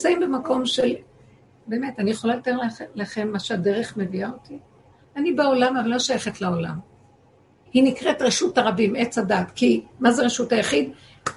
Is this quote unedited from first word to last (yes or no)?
no